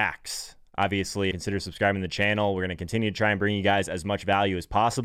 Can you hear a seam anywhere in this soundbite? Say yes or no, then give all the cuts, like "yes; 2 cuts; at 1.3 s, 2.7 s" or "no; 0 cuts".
yes; 1 cut; at 1.3 s